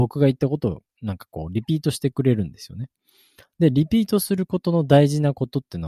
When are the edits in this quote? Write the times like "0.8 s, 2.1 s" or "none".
none